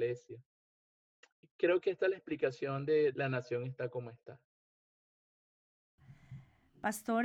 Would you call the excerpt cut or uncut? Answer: cut